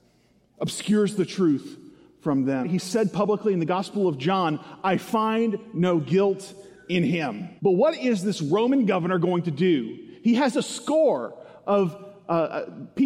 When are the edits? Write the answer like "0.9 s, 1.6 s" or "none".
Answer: 2.6 s, 7.6 s